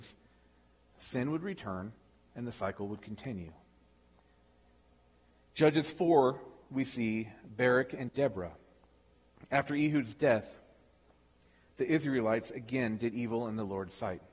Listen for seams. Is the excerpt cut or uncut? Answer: uncut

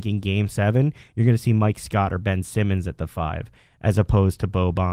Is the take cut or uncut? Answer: uncut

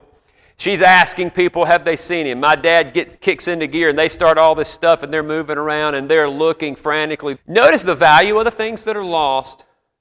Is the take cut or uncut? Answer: cut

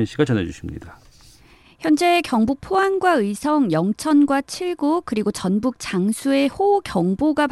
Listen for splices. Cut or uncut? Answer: uncut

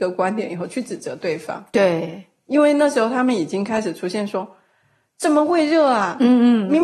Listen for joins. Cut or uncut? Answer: uncut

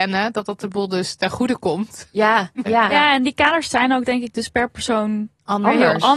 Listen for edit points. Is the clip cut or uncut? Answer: cut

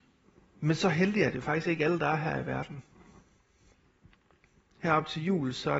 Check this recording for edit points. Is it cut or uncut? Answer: uncut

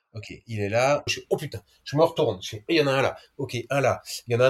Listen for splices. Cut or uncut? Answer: cut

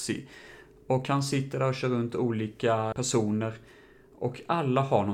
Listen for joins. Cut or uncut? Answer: cut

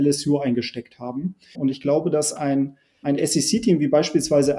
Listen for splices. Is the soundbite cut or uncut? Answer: cut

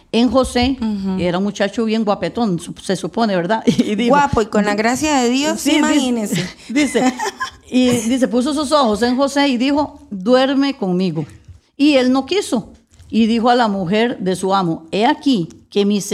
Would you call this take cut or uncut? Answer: uncut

